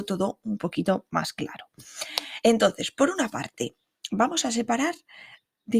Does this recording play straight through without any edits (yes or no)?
yes